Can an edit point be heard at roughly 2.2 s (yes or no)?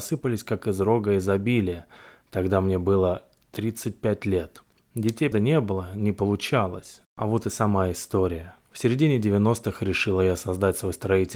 no